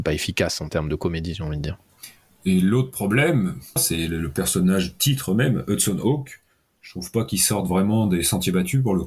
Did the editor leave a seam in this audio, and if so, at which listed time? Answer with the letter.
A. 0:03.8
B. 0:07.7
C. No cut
A